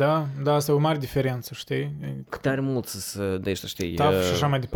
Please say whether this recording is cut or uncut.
uncut